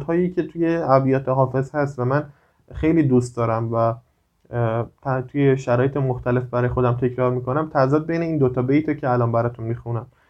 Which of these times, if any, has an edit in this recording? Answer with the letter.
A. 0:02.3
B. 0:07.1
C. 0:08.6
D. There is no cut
D